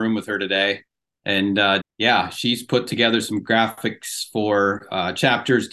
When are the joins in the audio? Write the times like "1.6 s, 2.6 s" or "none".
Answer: 1.8 s